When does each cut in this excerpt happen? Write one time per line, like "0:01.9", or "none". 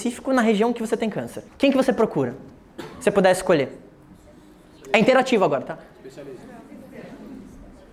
0:01.5